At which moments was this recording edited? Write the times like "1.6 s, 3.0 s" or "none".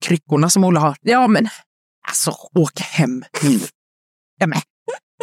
none